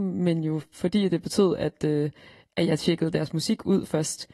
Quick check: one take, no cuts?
yes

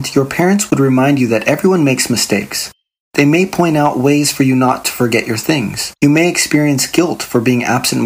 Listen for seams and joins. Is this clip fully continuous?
no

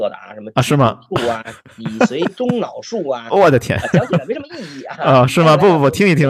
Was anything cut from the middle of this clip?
no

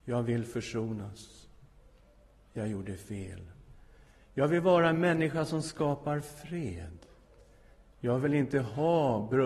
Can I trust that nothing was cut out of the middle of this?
yes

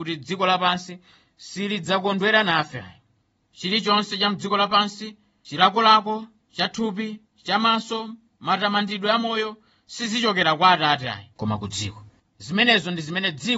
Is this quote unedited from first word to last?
no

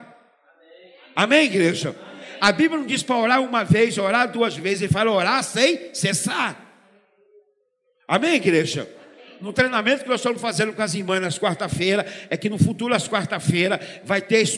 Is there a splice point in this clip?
no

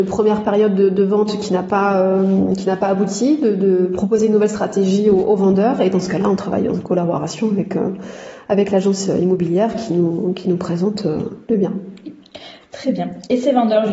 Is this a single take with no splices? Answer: yes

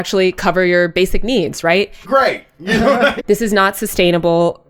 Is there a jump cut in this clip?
yes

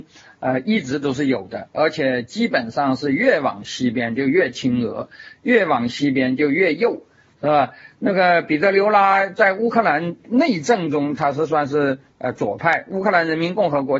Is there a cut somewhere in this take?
no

